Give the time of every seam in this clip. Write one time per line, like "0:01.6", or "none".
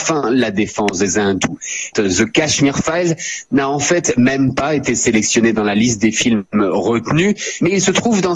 0:01.9